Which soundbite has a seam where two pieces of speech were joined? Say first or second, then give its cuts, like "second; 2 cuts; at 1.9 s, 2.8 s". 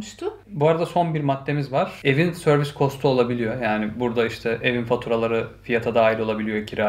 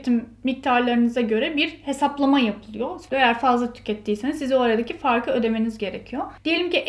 second; 1 cut; at 3.1 s